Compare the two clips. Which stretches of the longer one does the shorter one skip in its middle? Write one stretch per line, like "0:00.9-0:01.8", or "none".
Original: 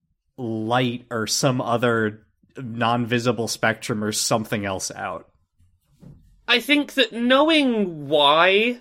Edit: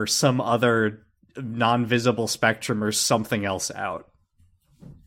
none